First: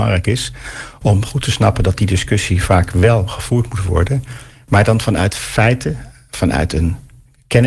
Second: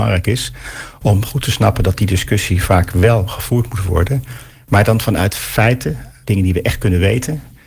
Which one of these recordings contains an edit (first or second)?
second